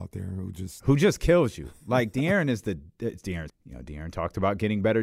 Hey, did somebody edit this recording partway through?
yes; 1 cut; at 3.5 s

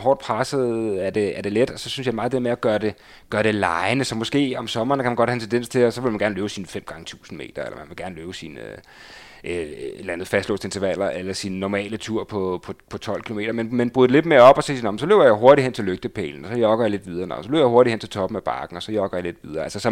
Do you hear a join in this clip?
no; 0 cuts

